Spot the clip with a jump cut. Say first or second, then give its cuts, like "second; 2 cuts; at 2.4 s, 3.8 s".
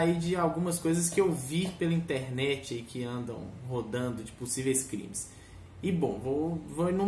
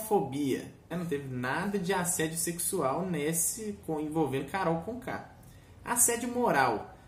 second; 1 cut; at 0.9 s